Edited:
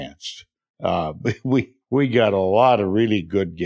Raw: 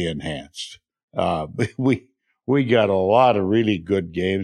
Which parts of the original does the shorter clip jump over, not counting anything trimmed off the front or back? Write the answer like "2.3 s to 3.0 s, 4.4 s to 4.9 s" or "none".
2.1 s to 2.4 s